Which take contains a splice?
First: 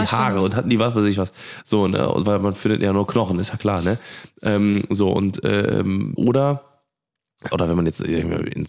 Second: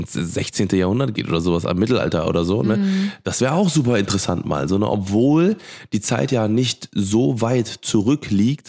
first; 2 cuts; at 6.2 s, 7.5 s

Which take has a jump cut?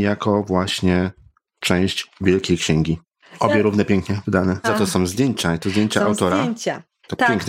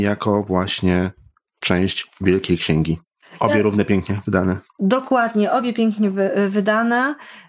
first; 1 cut; at 4.6 s

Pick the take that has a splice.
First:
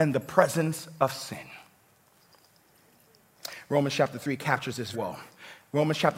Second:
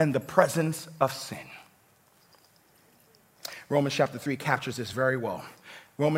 first; 1 cut; at 4.9 s

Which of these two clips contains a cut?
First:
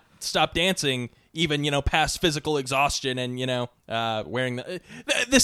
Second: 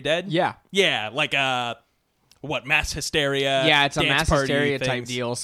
first; 1 cut; at 3.8 s

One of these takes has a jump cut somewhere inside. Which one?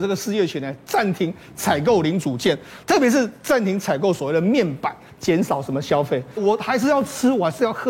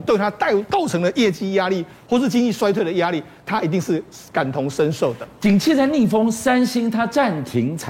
first; 2 cuts; at 5.1 s, 6.4 s

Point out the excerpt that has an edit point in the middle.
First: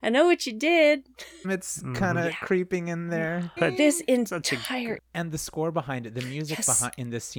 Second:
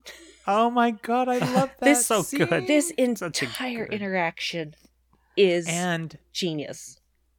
first; 3 cuts; at 1.4 s, 3.6 s, 5.0 s

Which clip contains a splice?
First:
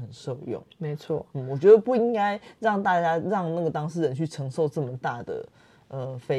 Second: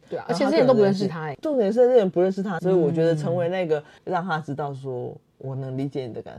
second; 2 cuts; at 2.6 s, 4.0 s

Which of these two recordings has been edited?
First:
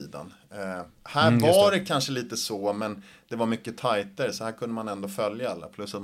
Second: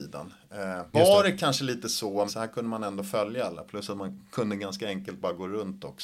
second; 2 cuts; at 0.9 s, 2.3 s

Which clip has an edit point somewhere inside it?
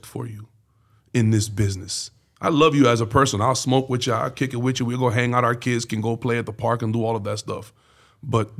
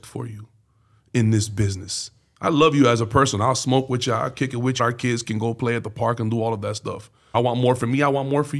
second; 2 cuts; at 4.8 s, 7.3 s

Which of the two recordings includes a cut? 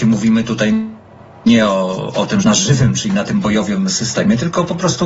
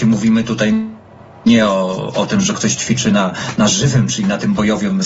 first; 1 cut; at 2.4 s

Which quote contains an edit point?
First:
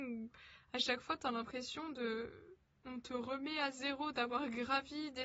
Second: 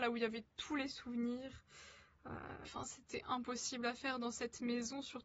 second; 1 cut; at 2.6 s

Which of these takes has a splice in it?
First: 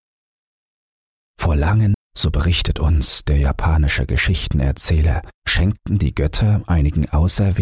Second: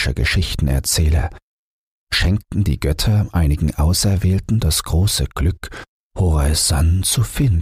first; 2 cuts; at 1.9 s, 5.4 s

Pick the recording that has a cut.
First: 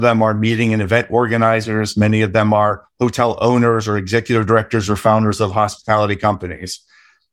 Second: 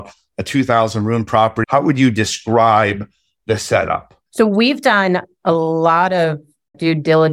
second; 2 cuts; at 1.6 s, 4.3 s

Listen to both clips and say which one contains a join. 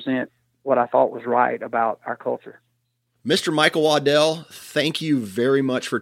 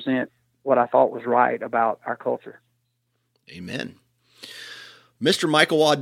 first; 1 cut; at 3.2 s

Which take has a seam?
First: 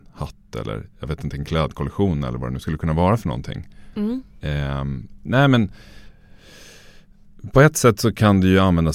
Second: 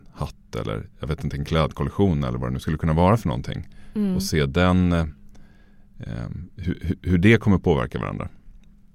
first; 2 cuts; at 3.9 s, 5.2 s

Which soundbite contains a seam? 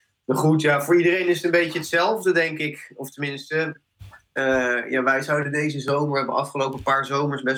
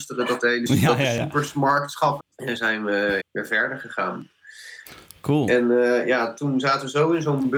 second; 2 cuts; at 2.2 s, 3.2 s

